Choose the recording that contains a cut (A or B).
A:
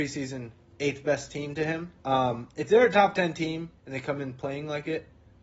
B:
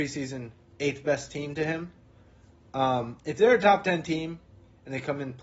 A